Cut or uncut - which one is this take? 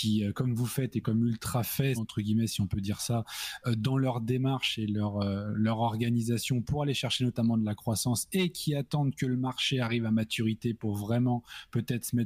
cut